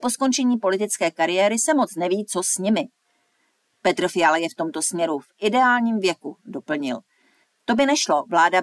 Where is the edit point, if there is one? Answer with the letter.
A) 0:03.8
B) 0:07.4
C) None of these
B